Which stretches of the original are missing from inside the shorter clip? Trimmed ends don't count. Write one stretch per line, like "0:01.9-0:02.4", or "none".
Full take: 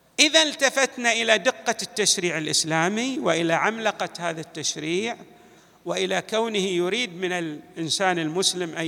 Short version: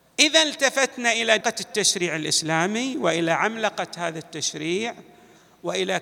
0:01.4-0:01.6